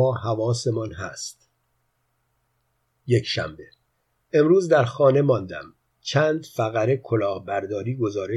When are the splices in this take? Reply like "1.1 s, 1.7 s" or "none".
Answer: none